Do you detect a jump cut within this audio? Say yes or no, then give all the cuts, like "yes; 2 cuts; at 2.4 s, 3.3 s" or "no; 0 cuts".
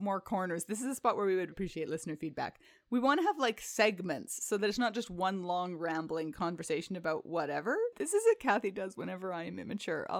yes; 2 cuts; at 1.5 s, 7.9 s